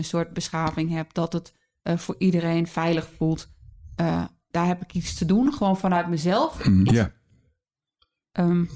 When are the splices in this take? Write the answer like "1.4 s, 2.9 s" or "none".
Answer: 4.5 s, 6.9 s

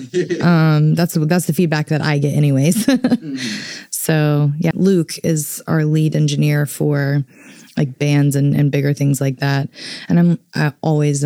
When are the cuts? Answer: 4.7 s

